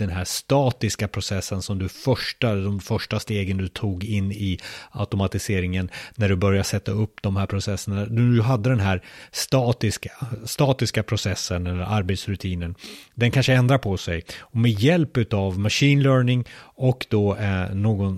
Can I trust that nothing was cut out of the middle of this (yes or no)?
yes